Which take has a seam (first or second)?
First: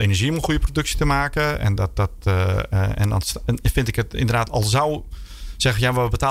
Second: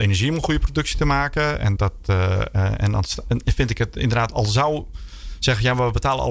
second